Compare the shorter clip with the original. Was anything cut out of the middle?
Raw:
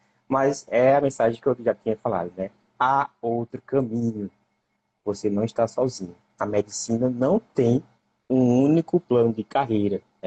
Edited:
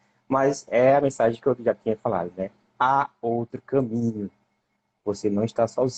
no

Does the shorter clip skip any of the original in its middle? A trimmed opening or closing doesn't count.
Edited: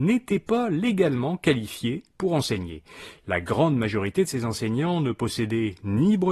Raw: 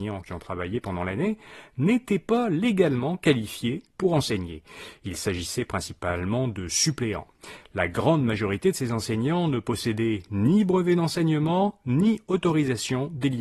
yes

